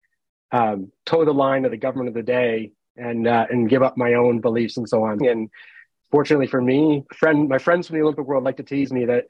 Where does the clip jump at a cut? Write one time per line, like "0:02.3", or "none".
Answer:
0:05.2
0:07.1